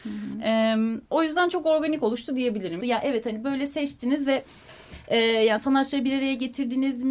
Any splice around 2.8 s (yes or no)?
yes